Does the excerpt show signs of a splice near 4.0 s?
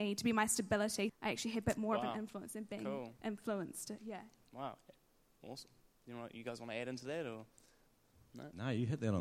no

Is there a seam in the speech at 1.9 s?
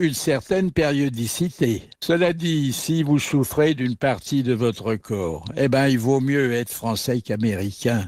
yes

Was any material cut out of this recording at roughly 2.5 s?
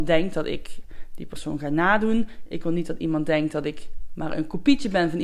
no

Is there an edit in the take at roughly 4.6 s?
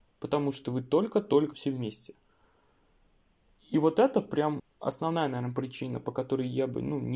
yes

